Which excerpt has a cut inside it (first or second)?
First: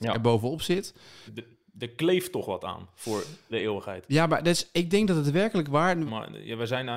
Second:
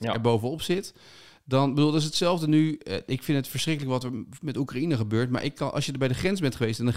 first